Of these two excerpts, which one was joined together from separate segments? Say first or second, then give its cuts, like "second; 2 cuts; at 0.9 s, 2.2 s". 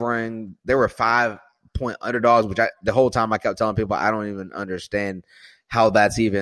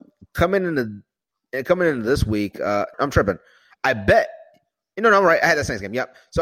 second; 1 cut; at 2.9 s